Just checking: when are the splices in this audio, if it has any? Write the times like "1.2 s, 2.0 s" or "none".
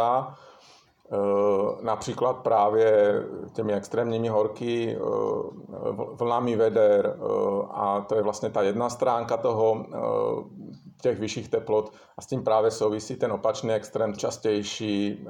14.2 s

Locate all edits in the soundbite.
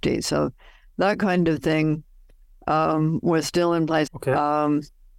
4.1 s

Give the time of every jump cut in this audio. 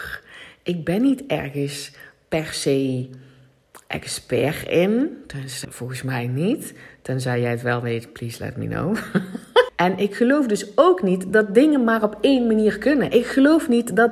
5.6 s, 9.7 s

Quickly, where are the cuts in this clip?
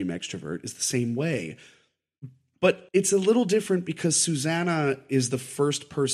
2.9 s

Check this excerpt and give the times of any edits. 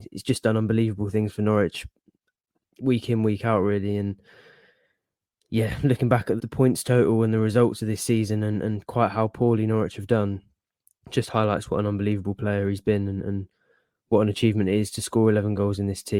6.4 s

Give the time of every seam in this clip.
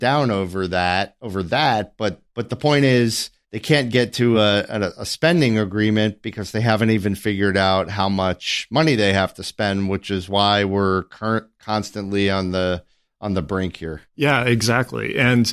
none

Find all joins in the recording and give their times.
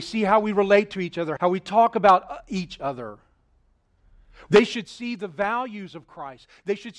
1.4 s, 4.5 s

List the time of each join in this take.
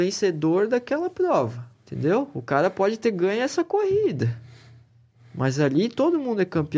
1.7 s

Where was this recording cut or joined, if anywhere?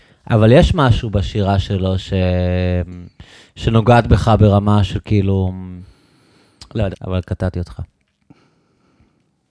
6.9 s

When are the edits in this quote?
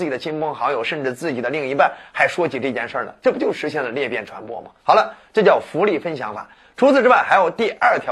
4.8 s

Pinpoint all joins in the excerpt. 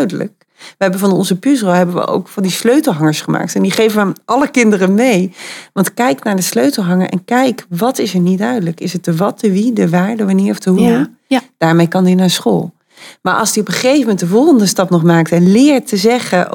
11.3 s

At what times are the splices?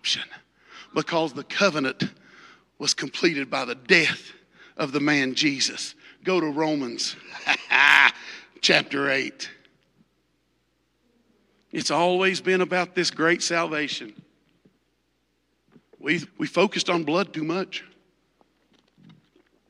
16.3 s

